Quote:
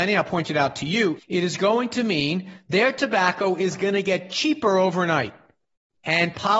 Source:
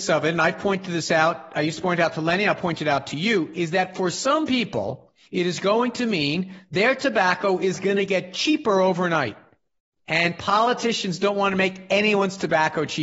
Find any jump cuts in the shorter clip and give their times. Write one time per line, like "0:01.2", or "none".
0:01.2